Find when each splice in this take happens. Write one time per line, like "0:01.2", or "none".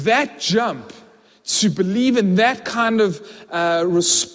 none

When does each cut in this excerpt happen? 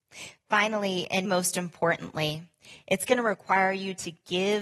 0:01.2

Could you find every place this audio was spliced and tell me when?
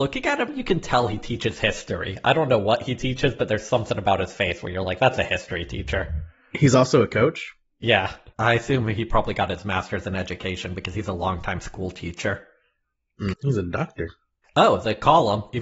0:08.3
0:13.3

